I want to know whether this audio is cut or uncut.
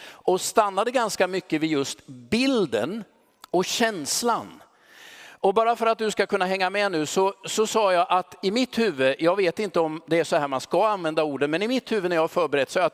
uncut